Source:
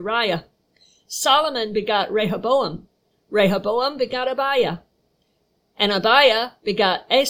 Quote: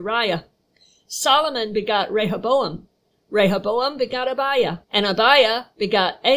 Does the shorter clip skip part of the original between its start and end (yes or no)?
yes